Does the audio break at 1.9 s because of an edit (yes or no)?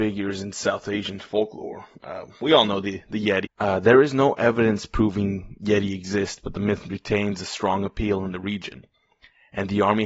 no